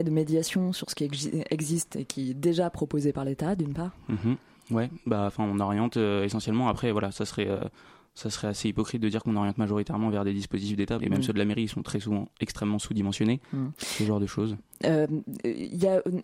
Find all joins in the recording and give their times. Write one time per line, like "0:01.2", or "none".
0:11.0
0:13.7